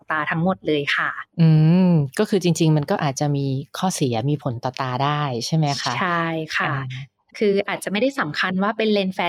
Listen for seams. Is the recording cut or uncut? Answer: uncut